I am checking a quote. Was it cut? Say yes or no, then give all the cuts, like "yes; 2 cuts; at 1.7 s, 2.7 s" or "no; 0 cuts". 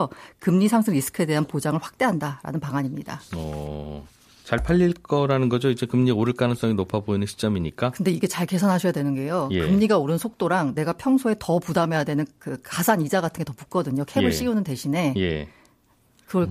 no; 0 cuts